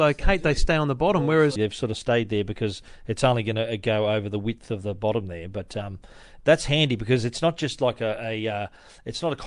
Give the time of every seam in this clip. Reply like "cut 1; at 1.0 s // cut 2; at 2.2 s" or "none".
cut 1; at 1.6 s